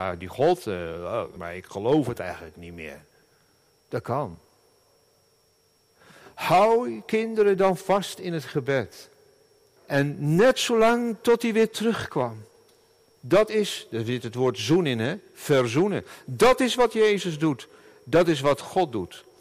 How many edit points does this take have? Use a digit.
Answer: 3